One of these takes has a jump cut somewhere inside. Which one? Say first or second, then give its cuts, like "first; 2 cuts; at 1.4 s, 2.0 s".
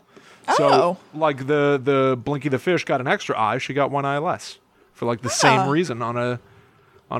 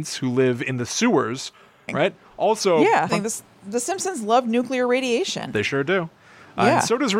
second; 2 cuts; at 1.9 s, 3.1 s